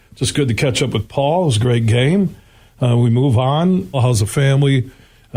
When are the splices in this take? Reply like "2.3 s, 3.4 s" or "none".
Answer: 3.9 s